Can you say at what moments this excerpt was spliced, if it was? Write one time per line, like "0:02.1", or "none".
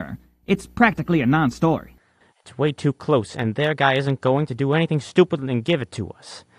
0:02.2
0:03.3